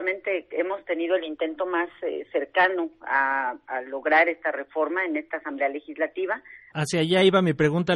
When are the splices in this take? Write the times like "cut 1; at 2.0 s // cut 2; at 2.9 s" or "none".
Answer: cut 1; at 6.7 s

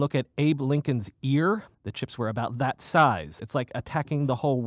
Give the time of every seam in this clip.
cut 1; at 1.7 s // cut 2; at 3.4 s

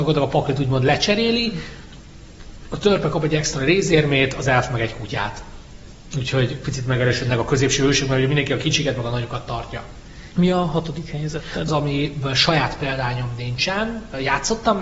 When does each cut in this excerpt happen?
cut 1; at 10.3 s // cut 2; at 11.7 s

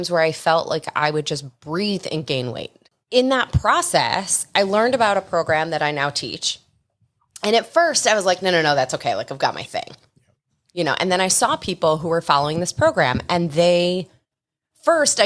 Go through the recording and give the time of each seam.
none

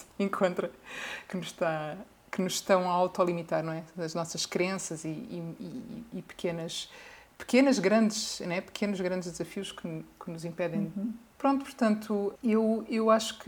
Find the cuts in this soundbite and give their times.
cut 1; at 11.3 s // cut 2; at 12.4 s

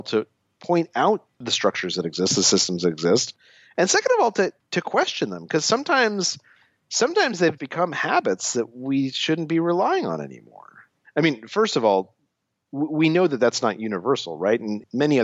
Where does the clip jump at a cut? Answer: cut 1; at 7.6 s // cut 2; at 11.0 s

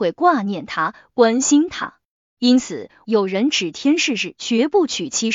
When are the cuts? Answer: cut 1; at 3.0 s

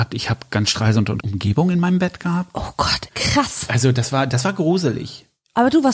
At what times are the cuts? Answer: cut 1; at 1.2 s // cut 2; at 3.1 s

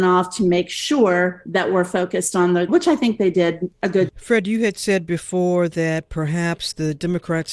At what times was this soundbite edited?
cut 1; at 2.7 s // cut 2; at 4.1 s

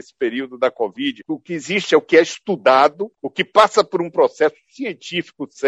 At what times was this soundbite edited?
cut 1; at 1.3 s

